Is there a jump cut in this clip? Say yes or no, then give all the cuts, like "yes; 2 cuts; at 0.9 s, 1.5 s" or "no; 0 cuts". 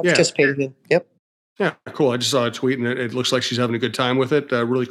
no; 0 cuts